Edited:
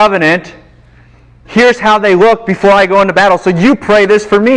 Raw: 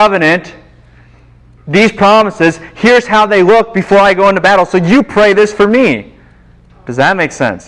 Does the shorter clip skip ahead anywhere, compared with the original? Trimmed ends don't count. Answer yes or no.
yes